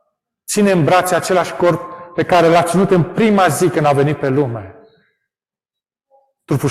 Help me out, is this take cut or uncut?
uncut